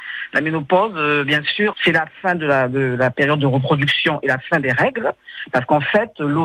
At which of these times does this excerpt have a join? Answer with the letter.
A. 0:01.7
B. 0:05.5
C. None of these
A